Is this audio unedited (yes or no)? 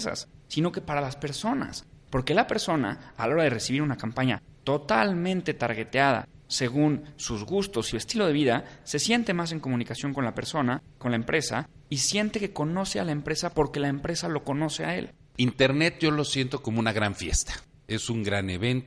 yes